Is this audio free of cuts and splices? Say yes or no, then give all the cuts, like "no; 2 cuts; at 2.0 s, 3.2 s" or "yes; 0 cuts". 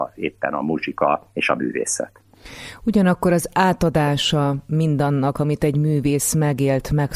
yes; 0 cuts